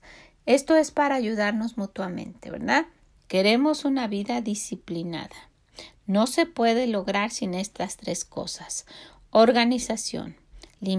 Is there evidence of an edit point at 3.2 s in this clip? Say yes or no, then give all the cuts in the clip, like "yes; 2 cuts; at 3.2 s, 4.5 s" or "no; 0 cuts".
yes; 1 cut; at 3.2 s